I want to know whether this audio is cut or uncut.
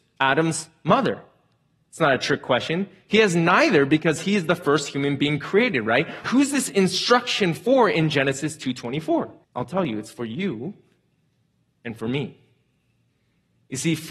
cut